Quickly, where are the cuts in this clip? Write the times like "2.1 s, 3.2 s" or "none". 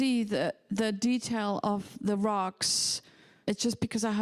none